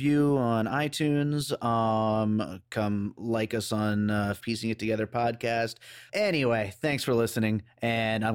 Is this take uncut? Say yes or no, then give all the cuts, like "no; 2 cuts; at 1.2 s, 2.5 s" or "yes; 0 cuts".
no; 2 cuts; at 4.4 s, 6.1 s